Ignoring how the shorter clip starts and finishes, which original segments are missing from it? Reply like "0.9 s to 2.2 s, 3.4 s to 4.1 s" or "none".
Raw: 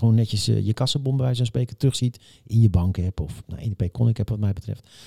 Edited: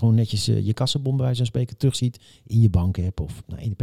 none